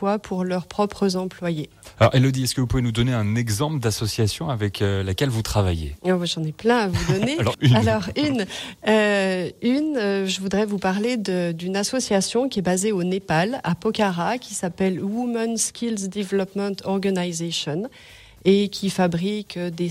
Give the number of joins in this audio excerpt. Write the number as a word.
one